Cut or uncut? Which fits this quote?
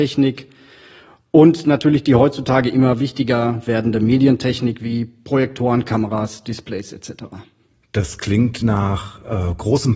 uncut